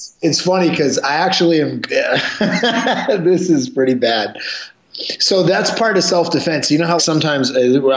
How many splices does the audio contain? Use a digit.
2